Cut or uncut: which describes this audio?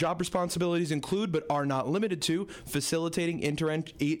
uncut